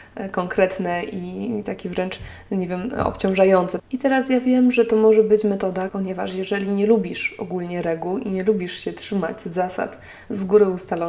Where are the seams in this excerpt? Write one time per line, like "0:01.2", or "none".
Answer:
0:03.8
0:05.9